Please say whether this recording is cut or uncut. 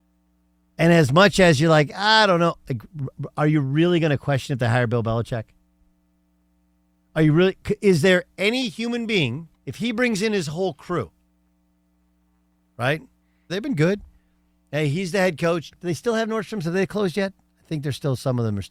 cut